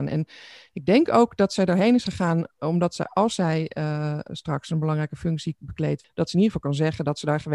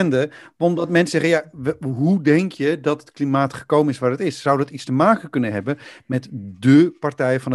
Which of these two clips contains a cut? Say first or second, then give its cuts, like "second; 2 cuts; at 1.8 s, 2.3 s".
first; 2 cuts; at 4.3 s, 6.0 s